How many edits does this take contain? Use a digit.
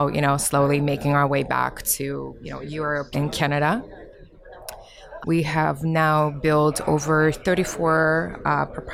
2